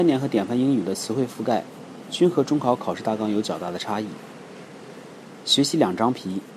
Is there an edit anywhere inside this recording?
no; 0 cuts

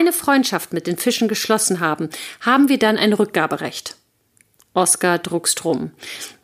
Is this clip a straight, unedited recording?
yes; 0 cuts

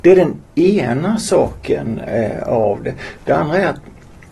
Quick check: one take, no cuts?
yes; 0 cuts

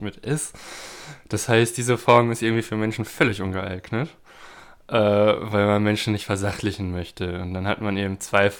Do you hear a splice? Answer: no; 0 cuts

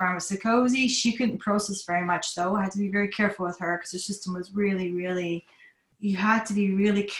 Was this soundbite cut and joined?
no; 0 cuts

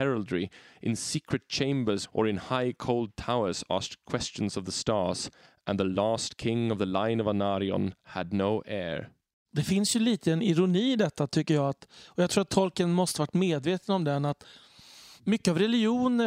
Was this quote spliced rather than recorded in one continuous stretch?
yes; 1 cut; at 2.0 s

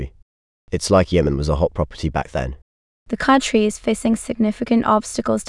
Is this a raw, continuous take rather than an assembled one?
no; 1 cut; at 2.9 s

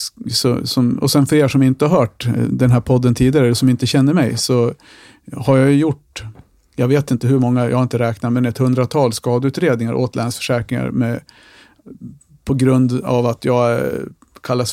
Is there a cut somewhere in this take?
no; 0 cuts

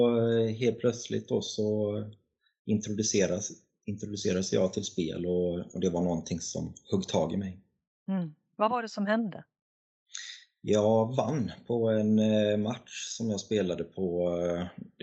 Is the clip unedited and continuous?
yes; 0 cuts

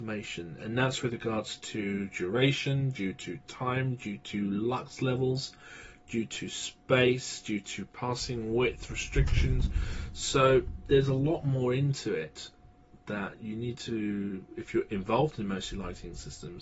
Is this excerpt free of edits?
yes; 0 cuts

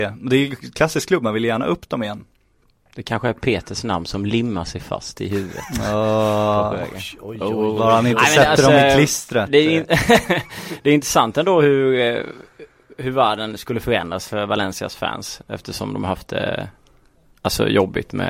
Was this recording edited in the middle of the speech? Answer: no; 0 cuts

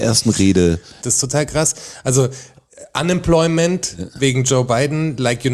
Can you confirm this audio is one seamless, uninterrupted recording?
no; 1 cut; at 1.0 s

